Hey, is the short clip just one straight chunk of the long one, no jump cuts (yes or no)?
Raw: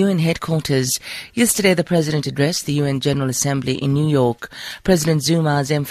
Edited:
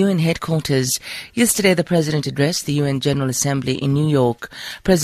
yes